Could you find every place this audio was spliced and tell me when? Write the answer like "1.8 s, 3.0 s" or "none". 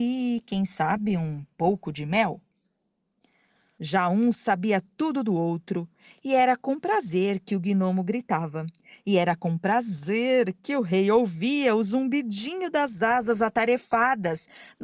3.8 s